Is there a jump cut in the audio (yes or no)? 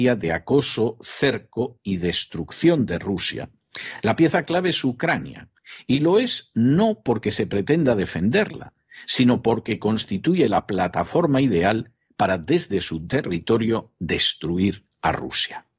no